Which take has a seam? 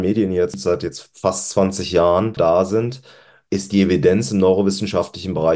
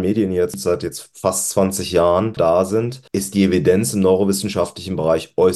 second; 1 cut; at 3.1 s

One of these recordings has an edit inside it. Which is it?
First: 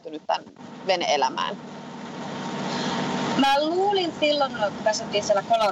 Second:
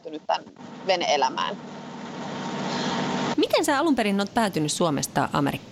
second; 1 cut; at 3.3 s

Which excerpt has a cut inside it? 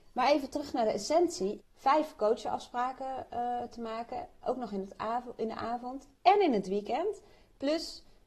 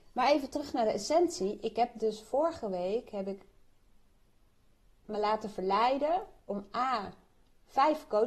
first; 1 cut; at 1.6 s

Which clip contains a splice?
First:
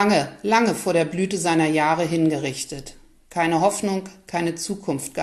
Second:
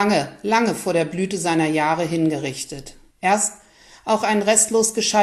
second; 1 cut; at 3.1 s

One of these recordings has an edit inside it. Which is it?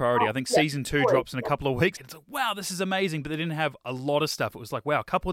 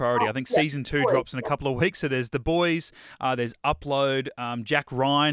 first; 1 cut; at 1.9 s

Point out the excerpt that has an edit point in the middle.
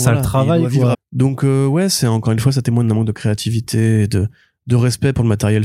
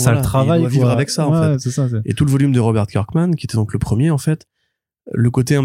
first; 1 cut; at 0.9 s

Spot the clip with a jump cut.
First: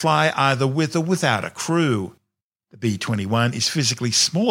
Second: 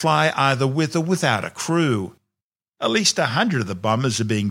second; 1 cut; at 2.6 s

